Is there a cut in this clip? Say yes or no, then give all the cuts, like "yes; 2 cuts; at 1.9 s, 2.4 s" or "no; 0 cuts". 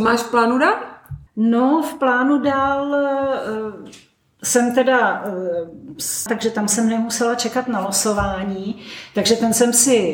yes; 2 cuts; at 1.3 s, 6.3 s